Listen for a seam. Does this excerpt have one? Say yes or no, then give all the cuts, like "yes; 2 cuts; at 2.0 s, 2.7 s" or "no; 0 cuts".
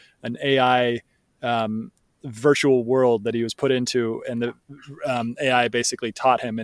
no; 0 cuts